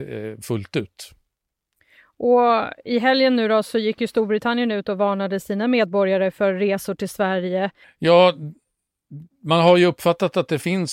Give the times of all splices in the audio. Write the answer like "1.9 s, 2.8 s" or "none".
7.8 s